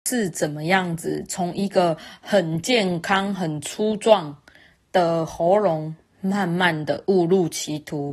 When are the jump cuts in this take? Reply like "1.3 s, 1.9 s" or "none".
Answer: none